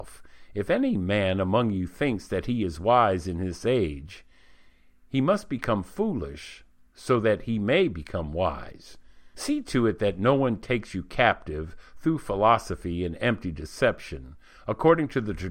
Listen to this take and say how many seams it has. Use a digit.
1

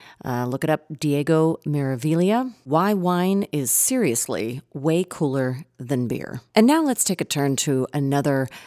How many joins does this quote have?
1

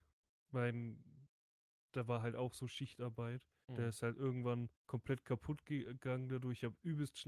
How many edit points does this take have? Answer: 2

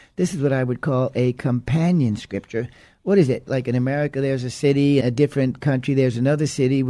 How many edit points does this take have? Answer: 2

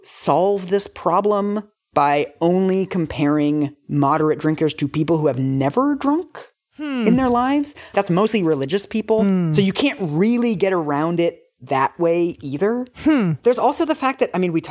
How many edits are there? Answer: 1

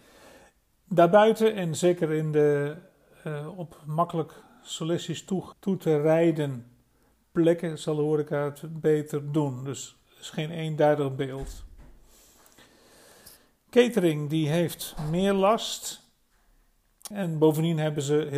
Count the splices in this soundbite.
2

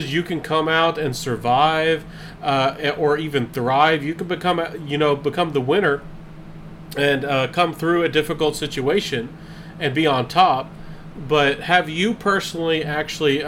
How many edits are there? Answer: 0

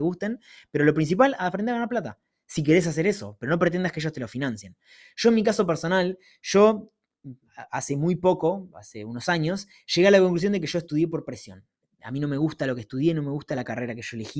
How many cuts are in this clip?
0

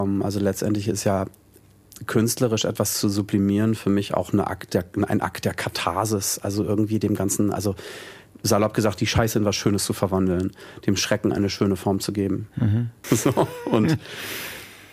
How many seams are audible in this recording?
1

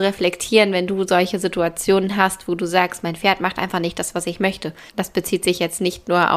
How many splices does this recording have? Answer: 1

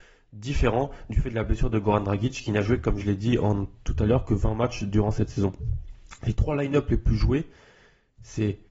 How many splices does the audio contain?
0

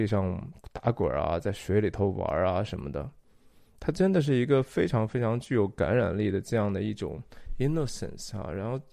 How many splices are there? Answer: 0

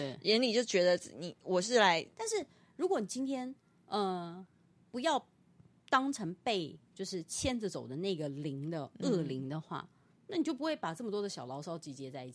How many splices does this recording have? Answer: 1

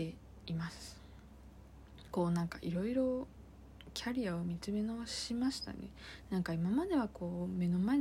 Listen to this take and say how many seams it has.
0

